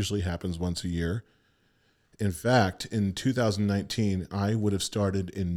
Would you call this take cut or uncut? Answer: uncut